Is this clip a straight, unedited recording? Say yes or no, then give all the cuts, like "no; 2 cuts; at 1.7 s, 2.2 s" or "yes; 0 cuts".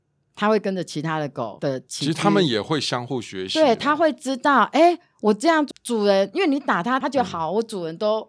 no; 2 cuts; at 5.7 s, 7.0 s